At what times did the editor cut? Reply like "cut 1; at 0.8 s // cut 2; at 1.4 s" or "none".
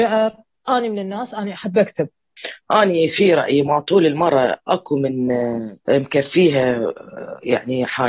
cut 1; at 5.8 s